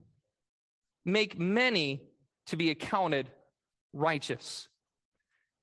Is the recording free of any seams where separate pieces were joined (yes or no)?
yes